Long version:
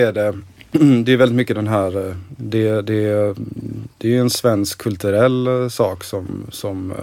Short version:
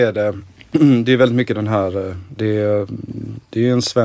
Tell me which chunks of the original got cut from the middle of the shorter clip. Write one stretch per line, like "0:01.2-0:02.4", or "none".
0:02.4-0:02.8